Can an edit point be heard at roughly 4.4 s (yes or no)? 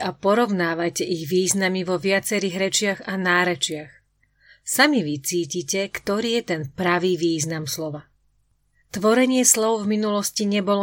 no